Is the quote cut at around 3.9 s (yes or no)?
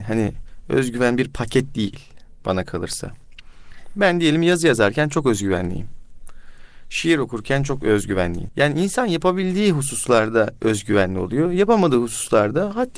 no